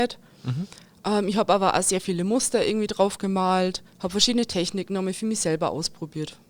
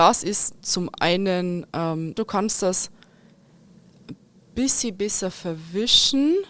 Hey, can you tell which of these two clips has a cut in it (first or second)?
second